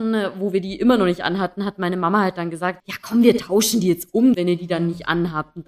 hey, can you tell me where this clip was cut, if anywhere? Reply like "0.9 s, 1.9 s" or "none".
2.8 s, 4.3 s